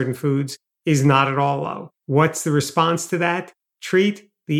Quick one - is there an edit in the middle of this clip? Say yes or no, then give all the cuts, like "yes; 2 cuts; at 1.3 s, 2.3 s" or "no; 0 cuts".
yes; 1 cut; at 2.0 s